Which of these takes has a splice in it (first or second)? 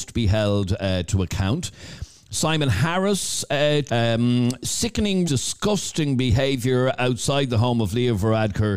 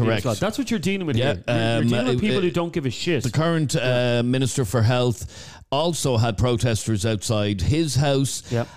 first